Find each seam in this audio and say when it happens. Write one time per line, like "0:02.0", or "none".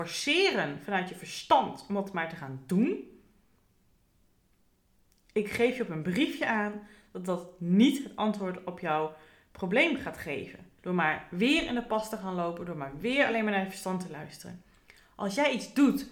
0:10.8